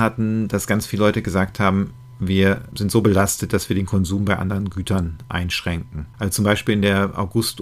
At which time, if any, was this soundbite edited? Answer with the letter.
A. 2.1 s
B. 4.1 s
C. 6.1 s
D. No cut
A